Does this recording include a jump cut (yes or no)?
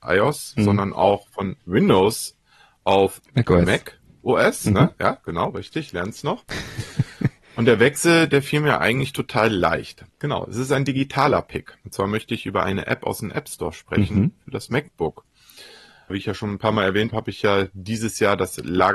yes